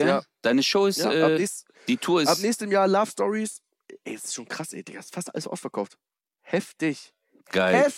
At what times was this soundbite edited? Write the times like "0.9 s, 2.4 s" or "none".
none